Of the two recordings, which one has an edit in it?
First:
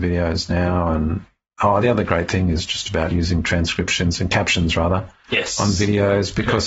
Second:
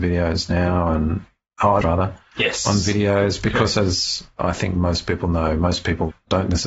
second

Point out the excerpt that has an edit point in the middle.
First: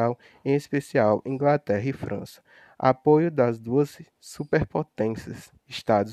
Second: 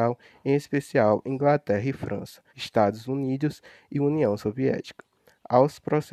second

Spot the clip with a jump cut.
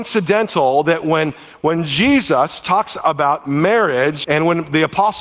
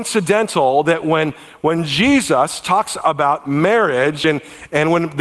first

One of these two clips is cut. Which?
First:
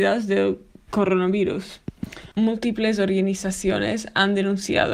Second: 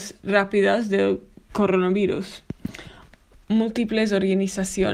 first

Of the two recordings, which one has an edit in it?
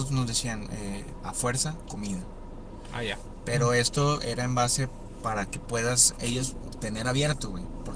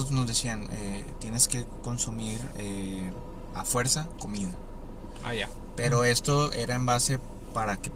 first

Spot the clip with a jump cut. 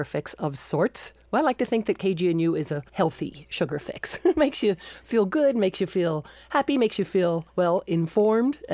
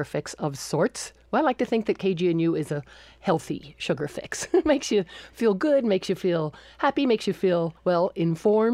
first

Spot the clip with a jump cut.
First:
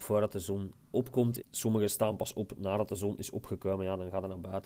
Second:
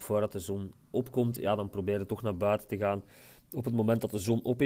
first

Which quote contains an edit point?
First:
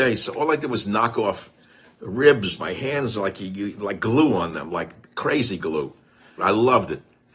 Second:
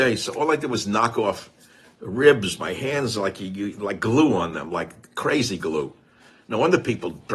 first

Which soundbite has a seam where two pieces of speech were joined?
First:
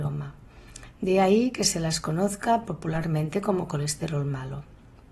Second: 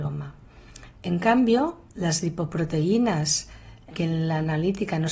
second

